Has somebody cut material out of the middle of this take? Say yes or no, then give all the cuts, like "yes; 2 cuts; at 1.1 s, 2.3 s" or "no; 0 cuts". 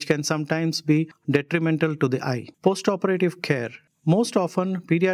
yes; 1 cut; at 2.5 s